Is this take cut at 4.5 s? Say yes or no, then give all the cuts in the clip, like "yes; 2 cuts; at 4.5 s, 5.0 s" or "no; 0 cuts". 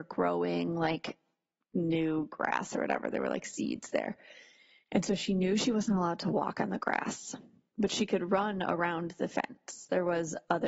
no; 0 cuts